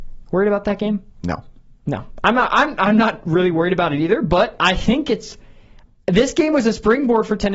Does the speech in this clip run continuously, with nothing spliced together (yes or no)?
yes